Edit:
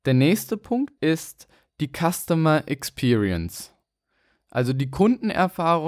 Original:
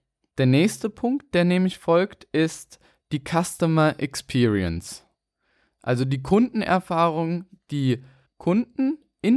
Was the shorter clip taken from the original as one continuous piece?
no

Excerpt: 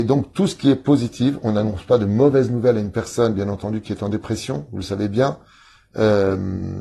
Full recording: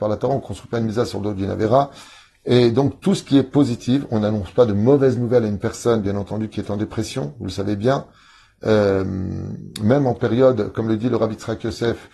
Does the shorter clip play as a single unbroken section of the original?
yes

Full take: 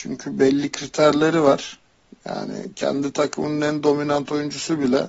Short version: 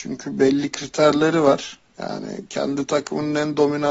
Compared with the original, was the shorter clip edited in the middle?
yes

